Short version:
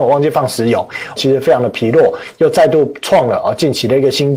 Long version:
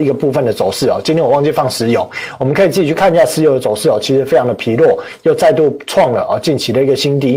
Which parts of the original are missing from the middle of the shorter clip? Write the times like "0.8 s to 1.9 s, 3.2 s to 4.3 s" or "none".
2.4 s to 4.0 s